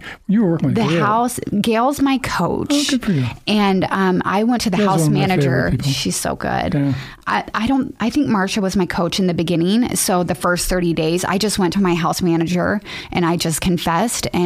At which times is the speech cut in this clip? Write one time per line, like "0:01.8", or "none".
none